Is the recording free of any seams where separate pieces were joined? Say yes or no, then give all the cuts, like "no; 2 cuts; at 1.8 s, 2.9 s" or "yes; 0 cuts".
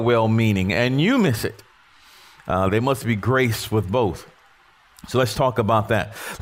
yes; 0 cuts